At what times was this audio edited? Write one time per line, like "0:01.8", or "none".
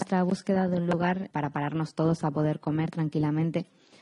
0:01.3